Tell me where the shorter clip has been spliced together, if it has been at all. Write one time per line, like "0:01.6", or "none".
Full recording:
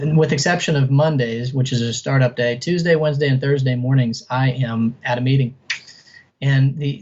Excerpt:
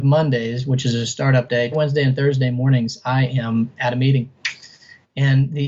0:01.7